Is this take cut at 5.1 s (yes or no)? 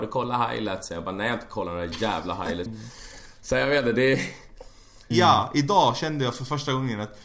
yes